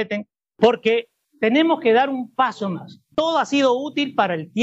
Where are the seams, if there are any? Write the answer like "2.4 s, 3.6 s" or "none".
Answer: none